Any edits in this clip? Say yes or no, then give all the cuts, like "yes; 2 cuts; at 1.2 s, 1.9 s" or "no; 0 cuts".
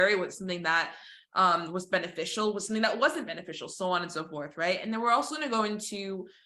no; 0 cuts